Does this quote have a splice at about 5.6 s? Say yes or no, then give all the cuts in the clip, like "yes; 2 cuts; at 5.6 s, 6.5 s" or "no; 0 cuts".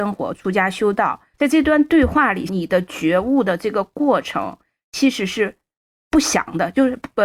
no; 2 cuts; at 1.3 s, 2.5 s